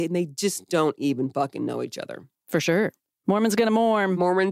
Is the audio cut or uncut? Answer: uncut